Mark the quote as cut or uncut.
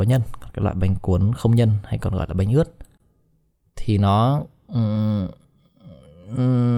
uncut